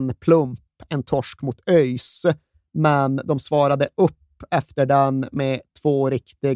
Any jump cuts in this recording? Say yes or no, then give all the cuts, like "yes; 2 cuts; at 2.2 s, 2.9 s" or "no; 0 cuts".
no; 0 cuts